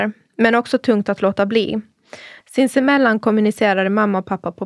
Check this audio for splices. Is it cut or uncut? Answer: cut